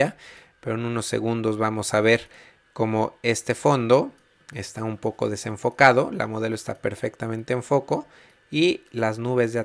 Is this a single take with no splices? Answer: yes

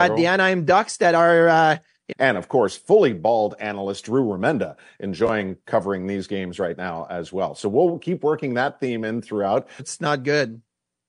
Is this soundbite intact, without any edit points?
no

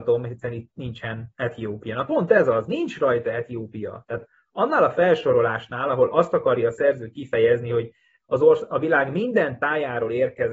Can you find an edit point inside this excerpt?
no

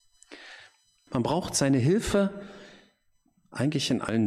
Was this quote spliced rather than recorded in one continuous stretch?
yes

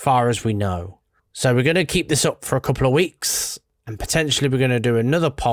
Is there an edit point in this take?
yes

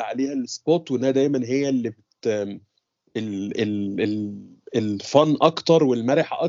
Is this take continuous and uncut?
yes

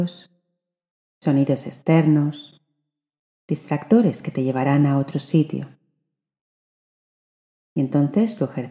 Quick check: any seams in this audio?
no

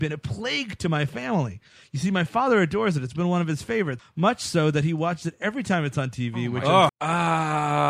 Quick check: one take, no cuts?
no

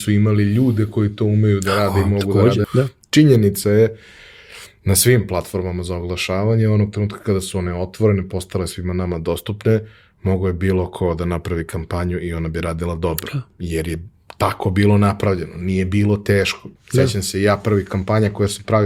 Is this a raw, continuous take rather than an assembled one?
no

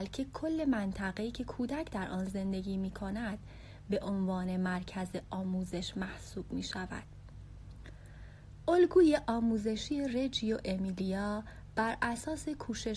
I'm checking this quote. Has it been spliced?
no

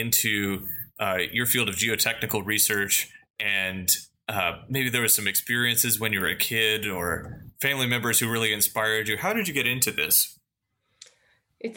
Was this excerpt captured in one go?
yes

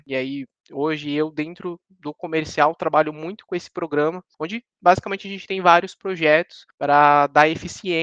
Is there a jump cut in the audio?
no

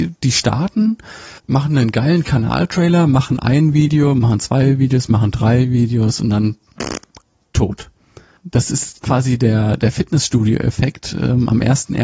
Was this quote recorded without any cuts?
no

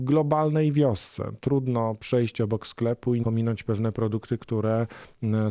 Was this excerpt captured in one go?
yes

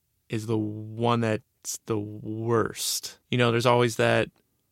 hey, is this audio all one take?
yes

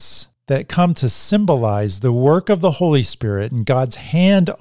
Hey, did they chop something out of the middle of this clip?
no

